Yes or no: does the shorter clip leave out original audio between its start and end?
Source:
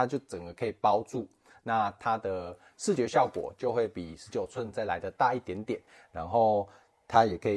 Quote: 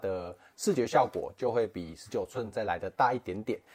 no